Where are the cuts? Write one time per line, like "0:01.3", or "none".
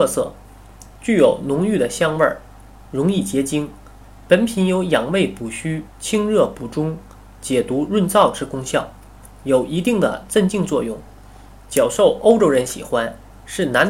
none